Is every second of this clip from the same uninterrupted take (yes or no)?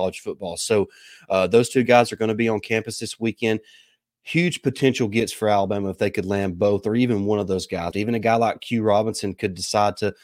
no